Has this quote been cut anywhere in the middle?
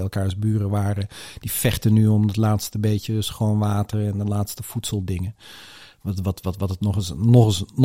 no; 0 cuts

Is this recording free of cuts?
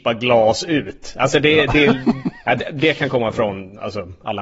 yes; 0 cuts

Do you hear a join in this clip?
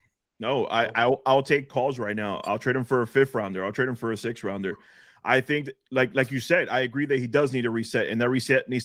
no; 0 cuts

